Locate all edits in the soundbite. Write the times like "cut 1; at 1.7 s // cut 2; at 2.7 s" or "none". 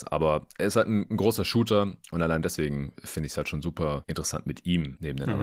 none